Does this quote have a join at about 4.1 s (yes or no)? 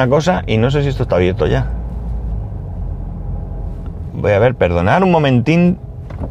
yes